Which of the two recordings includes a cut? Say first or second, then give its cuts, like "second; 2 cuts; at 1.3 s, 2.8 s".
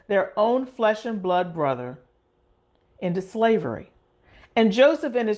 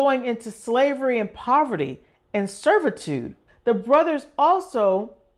second; 1 cut; at 3.5 s